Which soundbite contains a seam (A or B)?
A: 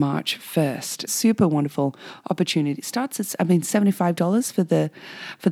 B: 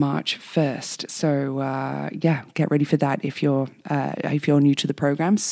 A